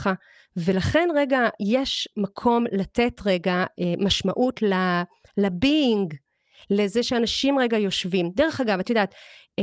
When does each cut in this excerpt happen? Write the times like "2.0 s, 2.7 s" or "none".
none